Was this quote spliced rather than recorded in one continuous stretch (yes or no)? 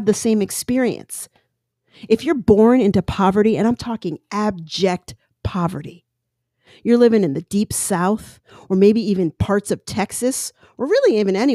no